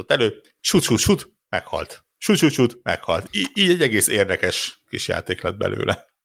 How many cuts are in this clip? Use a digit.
1